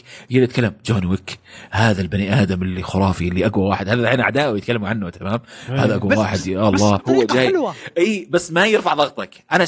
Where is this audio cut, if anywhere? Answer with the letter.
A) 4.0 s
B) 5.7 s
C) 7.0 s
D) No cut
C